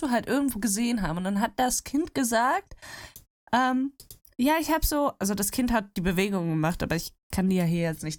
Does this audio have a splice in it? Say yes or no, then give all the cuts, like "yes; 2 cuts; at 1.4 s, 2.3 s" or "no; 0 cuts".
no; 0 cuts